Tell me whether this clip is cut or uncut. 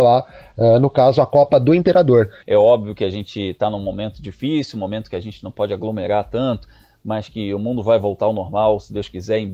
cut